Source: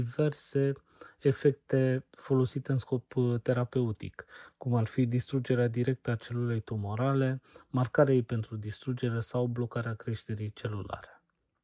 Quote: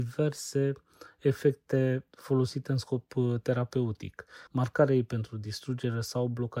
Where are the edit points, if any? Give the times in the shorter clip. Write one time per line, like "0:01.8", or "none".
0:04.5